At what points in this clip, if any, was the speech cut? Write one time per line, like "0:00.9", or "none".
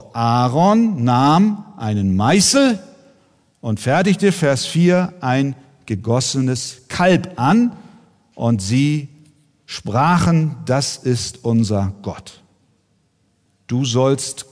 0:13.5